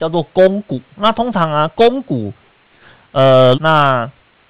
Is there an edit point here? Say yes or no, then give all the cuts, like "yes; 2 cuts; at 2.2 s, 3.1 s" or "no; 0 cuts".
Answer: yes; 2 cuts; at 0.9 s, 3.5 s